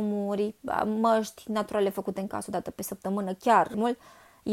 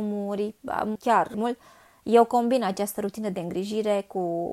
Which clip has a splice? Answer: second; 1 cut; at 1.0 s

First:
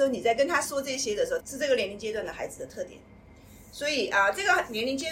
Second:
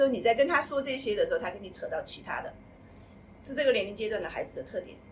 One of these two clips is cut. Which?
first; 1 cut; at 1.4 s

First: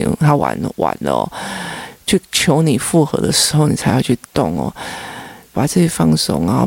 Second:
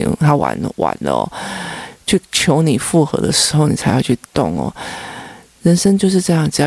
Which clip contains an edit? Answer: first; 1 cut; at 5.5 s

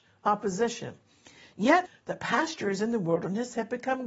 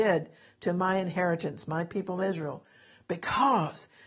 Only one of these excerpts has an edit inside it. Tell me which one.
first; 1 cut; at 1.9 s

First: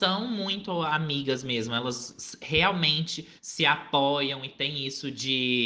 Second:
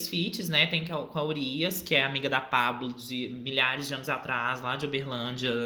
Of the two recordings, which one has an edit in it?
first; 1 cut; at 3.4 s

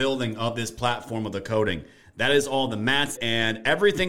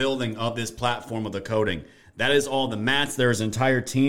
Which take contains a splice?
first; 1 cut; at 3.2 s

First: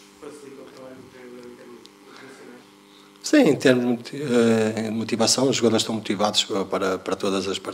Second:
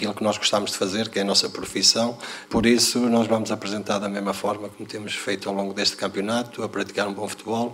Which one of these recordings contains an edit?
second; 1 cut; at 2.5 s

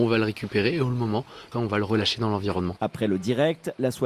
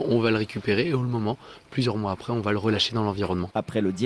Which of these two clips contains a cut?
first; 1 cut; at 1.5 s

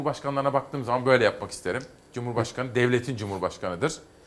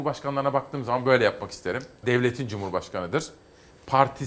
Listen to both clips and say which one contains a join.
second; 1 cut; at 2.0 s

